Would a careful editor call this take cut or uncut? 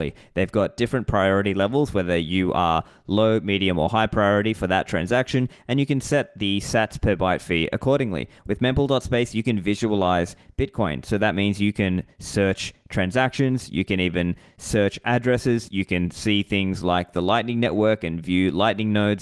uncut